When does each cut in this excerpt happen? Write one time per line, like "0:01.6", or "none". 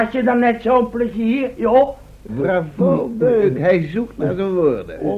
0:02.3